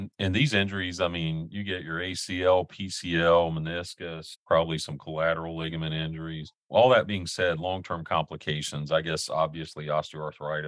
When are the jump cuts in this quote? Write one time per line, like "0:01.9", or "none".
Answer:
none